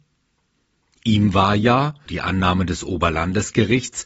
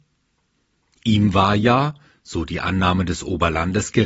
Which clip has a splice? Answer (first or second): first